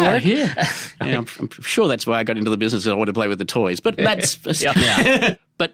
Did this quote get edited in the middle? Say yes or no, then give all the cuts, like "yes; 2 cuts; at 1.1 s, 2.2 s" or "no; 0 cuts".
yes; 1 cut; at 4.7 s